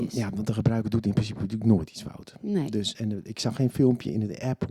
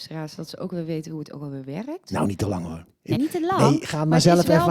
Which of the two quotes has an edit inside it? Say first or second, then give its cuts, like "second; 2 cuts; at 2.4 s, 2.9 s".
second; 1 cut; at 3.2 s